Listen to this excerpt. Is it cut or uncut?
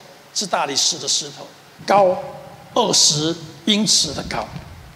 cut